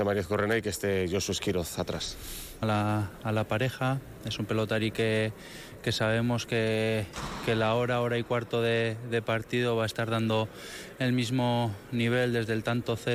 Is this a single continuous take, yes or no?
no